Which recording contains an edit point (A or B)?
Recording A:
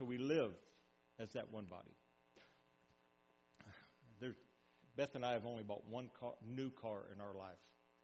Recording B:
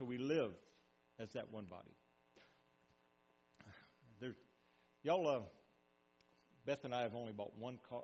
A